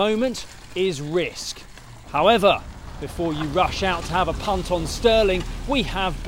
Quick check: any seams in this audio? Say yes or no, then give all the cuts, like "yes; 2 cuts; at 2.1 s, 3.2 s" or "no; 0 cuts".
yes; 1 cut; at 2.0 s